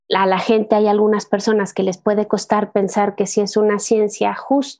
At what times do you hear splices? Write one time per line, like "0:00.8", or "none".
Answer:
none